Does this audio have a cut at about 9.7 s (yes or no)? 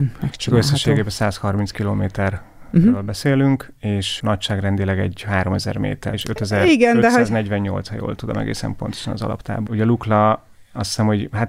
yes